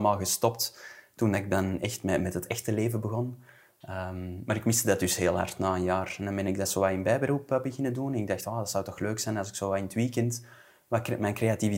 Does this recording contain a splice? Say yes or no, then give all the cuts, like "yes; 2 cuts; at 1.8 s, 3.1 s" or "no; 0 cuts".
no; 0 cuts